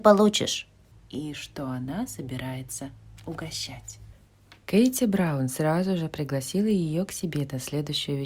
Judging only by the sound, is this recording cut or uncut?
cut